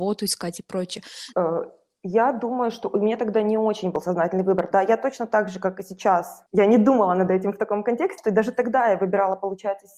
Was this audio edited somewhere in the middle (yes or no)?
yes